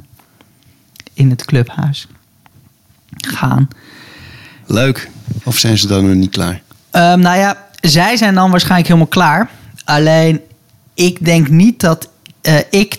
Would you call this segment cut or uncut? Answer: cut